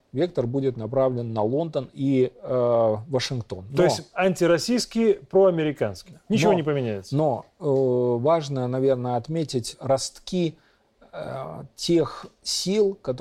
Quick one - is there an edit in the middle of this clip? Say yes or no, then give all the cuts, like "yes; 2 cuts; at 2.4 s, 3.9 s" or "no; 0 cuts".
no; 0 cuts